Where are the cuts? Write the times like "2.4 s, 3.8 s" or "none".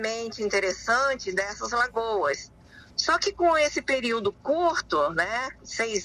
none